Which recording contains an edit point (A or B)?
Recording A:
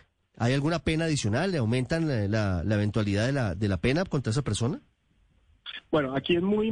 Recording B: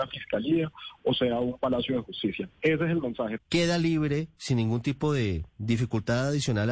B